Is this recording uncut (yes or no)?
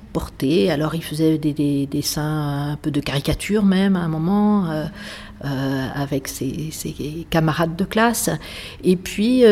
yes